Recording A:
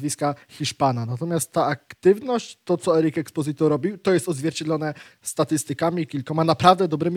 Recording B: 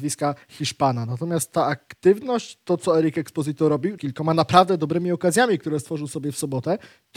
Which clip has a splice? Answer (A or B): B